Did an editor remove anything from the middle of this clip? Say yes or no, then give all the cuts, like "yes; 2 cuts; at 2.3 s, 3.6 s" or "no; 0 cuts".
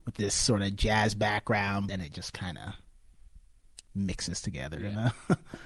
yes; 1 cut; at 1.9 s